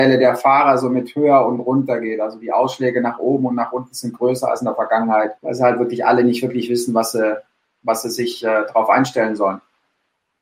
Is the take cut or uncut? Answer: cut